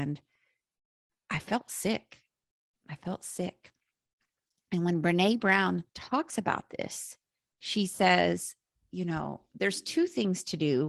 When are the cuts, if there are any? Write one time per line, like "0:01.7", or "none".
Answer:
0:05.9